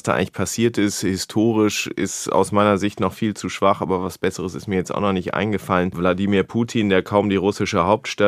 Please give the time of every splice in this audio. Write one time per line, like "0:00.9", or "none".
0:05.9